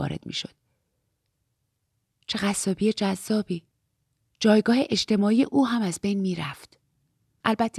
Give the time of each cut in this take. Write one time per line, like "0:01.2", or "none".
none